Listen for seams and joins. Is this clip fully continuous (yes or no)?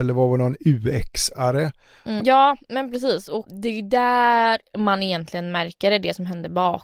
no